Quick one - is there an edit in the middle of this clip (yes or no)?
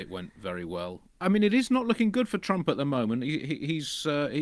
no